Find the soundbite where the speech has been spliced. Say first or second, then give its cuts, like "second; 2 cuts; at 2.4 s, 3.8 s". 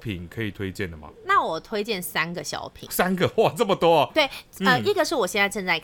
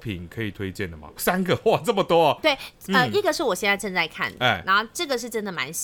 second; 1 cut; at 1.2 s